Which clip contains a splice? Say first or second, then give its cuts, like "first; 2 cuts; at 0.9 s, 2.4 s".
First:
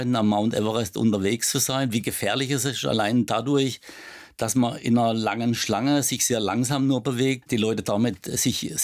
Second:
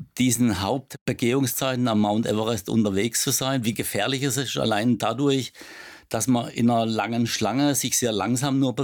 first; 1 cut; at 7.4 s